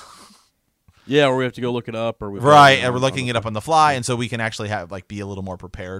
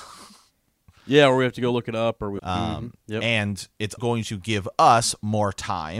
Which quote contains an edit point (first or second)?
second